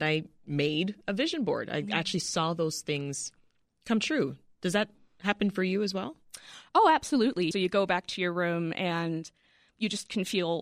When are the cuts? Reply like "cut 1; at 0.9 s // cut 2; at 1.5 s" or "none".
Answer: cut 1; at 7.5 s